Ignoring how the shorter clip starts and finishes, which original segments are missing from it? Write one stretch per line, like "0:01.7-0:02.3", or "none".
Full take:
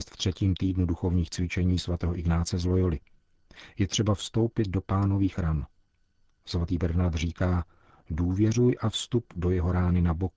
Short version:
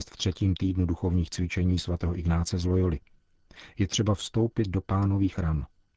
none